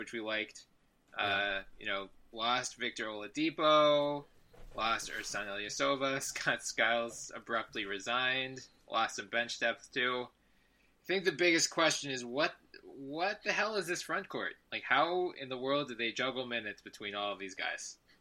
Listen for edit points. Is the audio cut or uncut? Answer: uncut